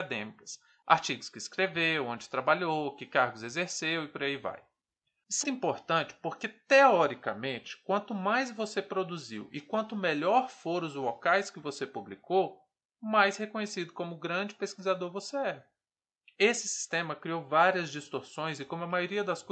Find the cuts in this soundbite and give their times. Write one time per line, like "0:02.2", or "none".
0:05.4